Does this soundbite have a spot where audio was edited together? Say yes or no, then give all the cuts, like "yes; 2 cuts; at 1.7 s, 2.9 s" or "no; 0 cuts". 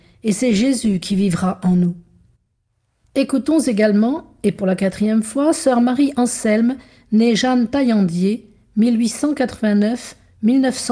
no; 0 cuts